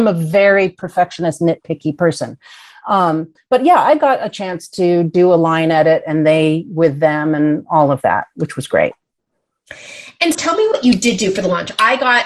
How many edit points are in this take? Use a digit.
1